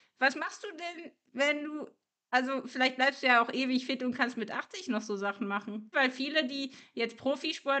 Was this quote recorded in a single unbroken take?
no; 1 cut; at 5.9 s

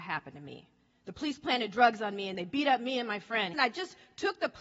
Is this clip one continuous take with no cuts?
no; 1 cut; at 3.5 s

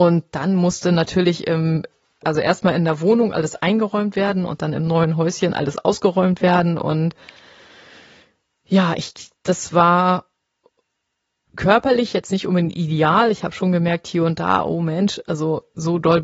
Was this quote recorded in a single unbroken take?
yes; 0 cuts

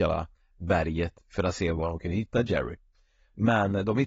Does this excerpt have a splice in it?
no; 0 cuts

